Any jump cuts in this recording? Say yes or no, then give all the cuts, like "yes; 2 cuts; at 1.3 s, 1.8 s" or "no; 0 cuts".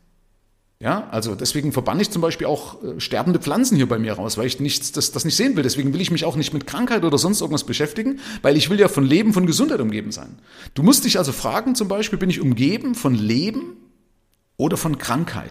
yes; 1 cut; at 10.7 s